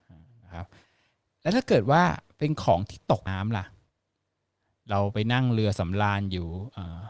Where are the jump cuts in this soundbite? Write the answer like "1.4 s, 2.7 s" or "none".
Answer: 3.3 s